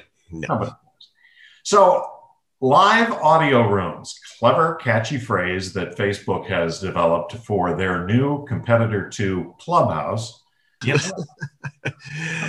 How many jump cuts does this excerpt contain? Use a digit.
1